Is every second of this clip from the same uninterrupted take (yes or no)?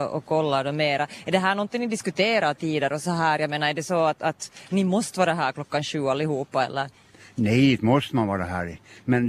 yes